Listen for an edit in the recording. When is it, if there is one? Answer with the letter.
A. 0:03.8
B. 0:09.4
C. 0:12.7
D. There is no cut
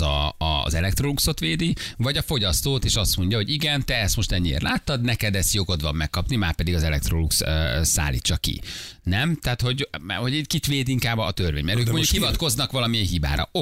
D